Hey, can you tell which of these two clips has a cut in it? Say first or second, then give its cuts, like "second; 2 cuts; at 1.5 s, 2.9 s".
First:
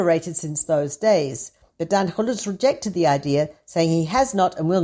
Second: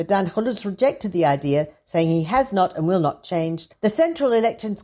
second; 1 cut; at 3.7 s